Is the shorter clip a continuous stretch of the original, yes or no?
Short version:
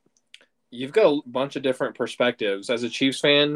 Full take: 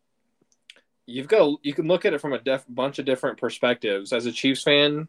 no